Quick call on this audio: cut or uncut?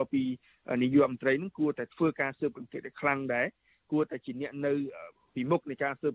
uncut